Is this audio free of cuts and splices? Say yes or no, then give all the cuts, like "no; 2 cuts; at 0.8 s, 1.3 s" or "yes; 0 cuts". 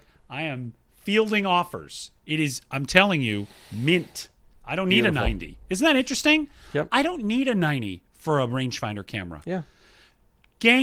yes; 0 cuts